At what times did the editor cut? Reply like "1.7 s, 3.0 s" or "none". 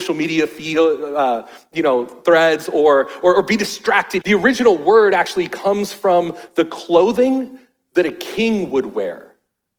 4.2 s